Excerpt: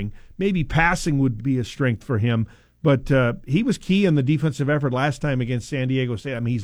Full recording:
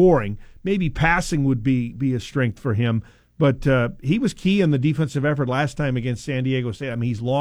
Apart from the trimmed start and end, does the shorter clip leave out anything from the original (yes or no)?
yes